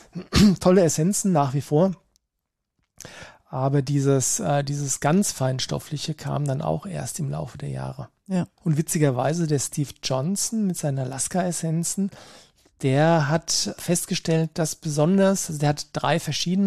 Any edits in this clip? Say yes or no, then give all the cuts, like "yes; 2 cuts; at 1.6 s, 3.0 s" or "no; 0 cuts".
yes; 2 cuts; at 8.6 s, 13.8 s